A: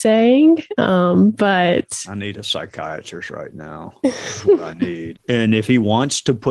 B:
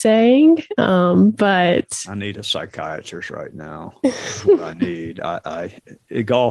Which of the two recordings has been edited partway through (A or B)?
A